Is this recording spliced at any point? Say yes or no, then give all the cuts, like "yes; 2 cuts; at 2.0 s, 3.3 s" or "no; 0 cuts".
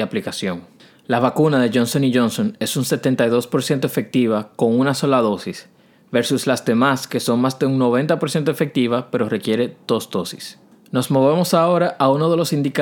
no; 0 cuts